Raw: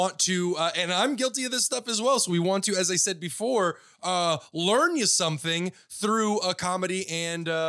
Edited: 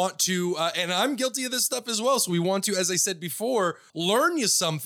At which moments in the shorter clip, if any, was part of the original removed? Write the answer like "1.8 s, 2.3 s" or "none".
3.9 s

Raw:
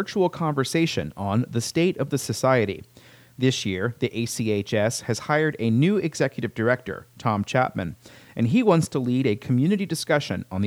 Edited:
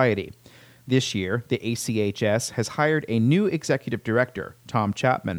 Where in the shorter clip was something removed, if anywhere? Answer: none

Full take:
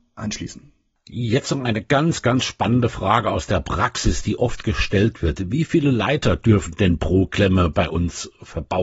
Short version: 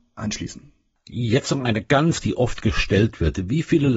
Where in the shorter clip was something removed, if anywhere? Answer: 2.2 s

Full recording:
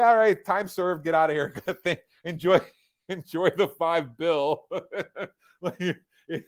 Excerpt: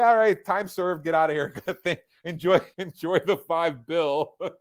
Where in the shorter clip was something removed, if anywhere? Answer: 2.7 s

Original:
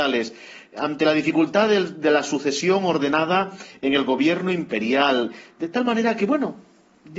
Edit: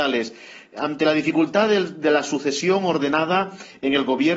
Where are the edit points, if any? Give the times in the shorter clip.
none

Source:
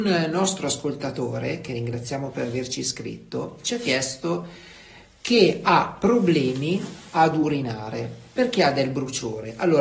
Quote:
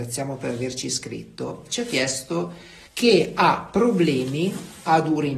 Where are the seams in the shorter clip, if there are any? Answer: 2.9 s

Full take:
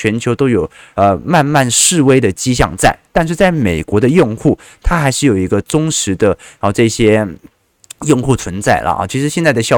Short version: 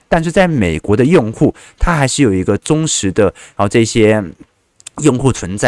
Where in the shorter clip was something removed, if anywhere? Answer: none

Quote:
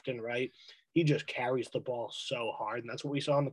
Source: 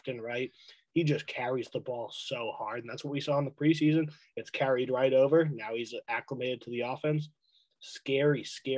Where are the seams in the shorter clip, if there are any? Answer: none

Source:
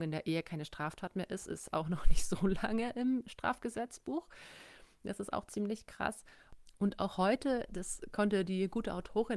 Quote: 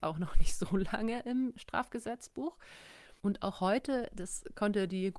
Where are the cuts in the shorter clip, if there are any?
3.2 s

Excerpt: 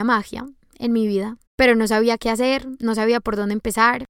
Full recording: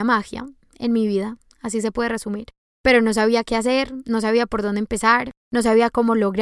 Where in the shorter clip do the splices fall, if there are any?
1.5 s

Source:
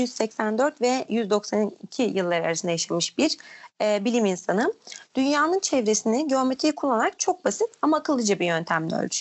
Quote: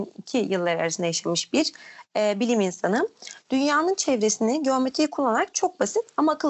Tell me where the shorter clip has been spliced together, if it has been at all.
none

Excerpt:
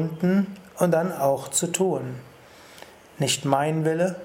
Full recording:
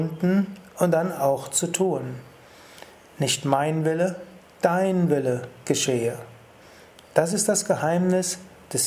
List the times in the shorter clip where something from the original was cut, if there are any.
none

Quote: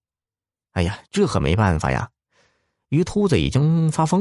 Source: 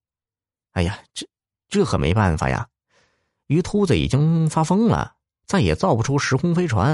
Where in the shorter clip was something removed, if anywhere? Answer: 1.1 s

